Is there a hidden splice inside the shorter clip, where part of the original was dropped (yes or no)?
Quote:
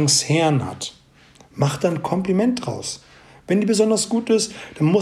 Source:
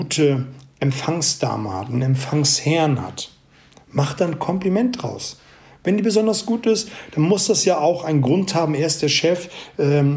no